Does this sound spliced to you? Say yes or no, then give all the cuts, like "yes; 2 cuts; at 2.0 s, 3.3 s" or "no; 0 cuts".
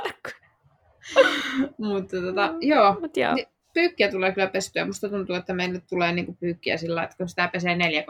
no; 0 cuts